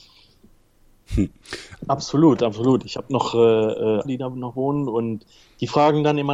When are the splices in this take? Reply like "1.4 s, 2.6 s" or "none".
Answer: 1.8 s, 4.0 s